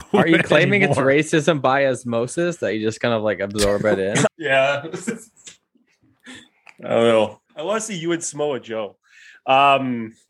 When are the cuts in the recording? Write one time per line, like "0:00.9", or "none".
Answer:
0:04.3
0:07.5

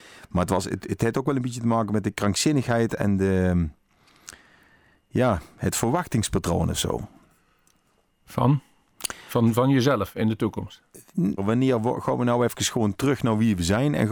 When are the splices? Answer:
0:11.4

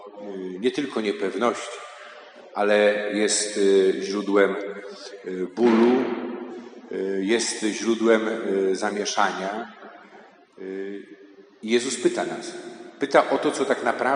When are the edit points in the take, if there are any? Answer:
none

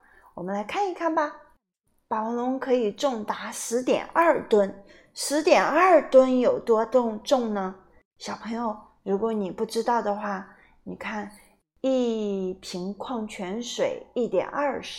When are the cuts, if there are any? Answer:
none

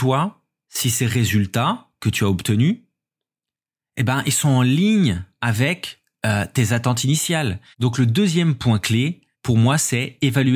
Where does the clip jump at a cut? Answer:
0:07.7
0:09.3

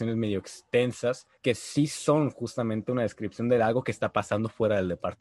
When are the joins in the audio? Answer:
0:01.4

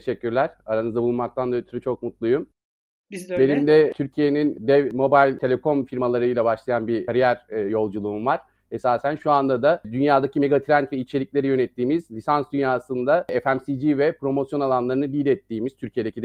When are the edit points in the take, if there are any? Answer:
none

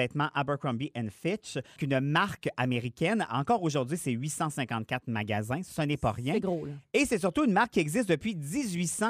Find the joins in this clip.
0:01.8

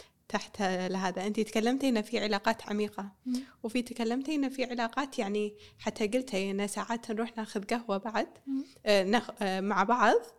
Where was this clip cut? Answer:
none

